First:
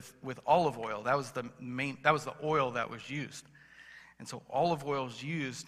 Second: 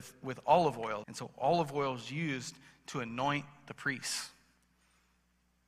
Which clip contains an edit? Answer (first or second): second